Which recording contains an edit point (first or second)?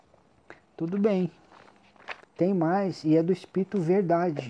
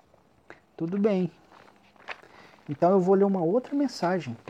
first